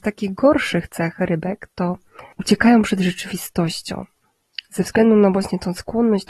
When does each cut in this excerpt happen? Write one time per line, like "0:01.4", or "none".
0:02.3